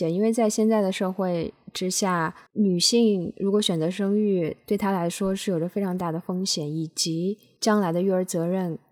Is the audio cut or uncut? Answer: uncut